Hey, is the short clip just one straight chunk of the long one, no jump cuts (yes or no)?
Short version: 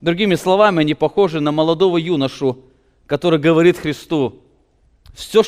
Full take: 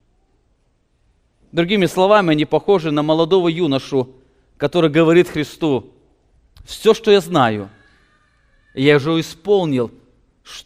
yes